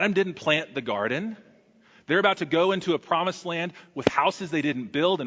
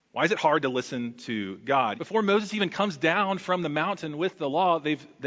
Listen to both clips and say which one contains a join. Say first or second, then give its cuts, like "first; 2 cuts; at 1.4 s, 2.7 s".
second; 1 cut; at 2.0 s